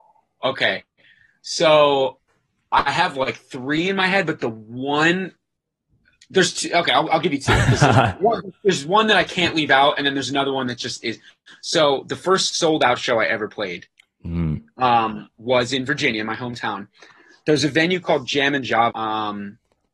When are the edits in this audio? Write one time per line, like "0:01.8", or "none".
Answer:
0:18.9